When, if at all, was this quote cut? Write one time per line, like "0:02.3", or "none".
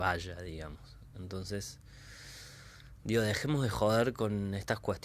none